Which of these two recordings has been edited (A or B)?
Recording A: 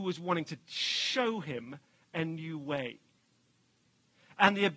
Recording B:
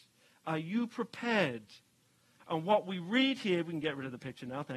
B